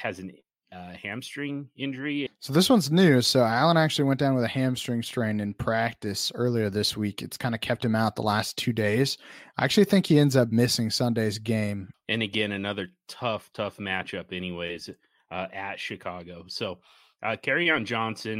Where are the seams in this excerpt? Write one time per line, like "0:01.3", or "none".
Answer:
0:02.3
0:11.9